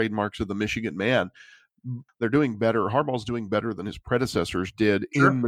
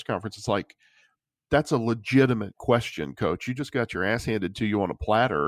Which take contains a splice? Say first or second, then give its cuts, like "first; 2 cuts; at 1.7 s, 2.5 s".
first; 1 cut; at 2.1 s